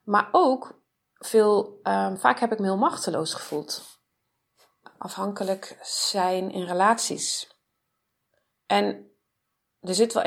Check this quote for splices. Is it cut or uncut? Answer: cut